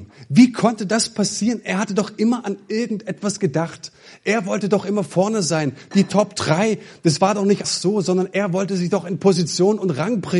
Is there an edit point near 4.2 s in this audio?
no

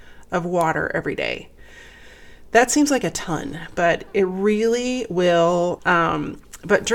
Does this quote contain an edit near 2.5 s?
no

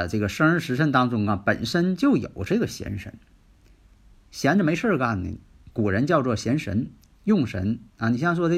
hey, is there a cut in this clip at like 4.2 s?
no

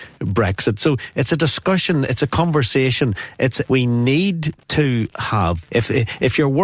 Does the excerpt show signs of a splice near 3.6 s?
yes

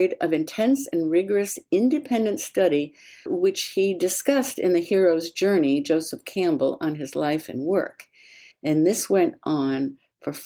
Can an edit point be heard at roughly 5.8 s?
no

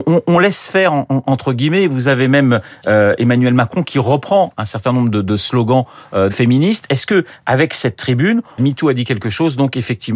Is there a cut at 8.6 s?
yes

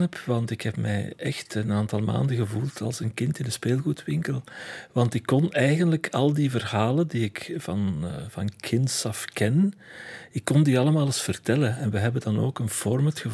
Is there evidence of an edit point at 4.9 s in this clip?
no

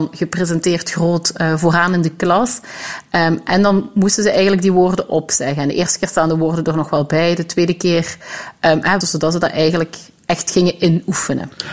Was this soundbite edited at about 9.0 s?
yes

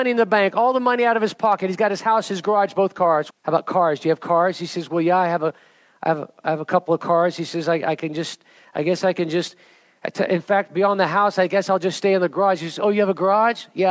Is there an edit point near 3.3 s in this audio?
yes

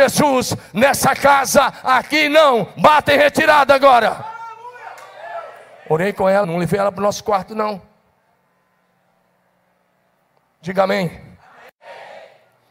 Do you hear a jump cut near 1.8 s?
no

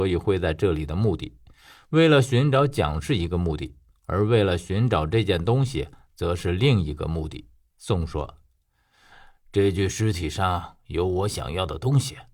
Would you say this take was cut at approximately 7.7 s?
yes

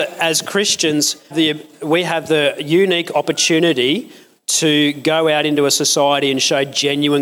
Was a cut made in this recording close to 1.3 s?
yes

